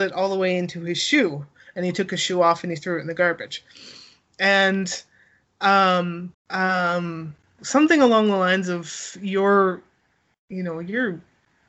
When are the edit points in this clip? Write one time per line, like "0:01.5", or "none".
0:06.3
0:07.6